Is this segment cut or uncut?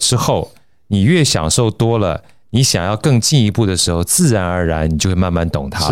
uncut